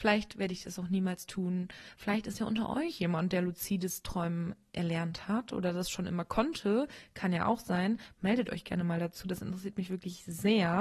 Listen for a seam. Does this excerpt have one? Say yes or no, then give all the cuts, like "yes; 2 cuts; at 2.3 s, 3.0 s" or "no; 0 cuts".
no; 0 cuts